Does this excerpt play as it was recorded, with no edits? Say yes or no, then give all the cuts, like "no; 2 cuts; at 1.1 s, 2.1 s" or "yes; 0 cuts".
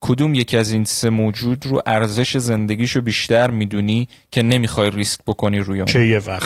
yes; 0 cuts